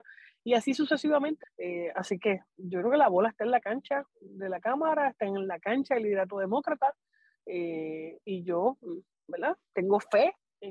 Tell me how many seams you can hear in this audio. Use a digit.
1